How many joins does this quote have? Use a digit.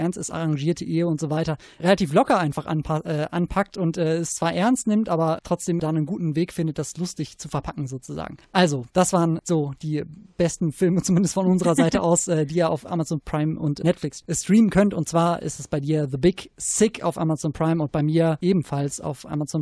2